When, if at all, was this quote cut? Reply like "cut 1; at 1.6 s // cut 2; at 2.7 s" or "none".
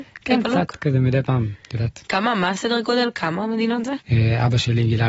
cut 1; at 4.0 s